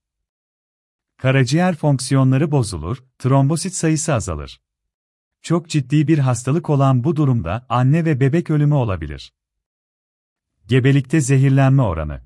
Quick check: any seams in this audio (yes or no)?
yes